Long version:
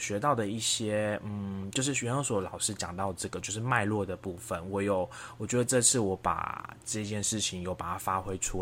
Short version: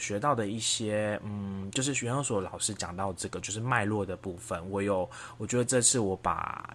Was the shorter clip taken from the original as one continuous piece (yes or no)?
yes